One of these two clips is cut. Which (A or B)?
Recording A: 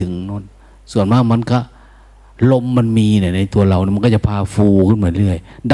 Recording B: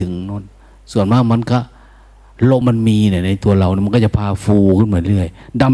B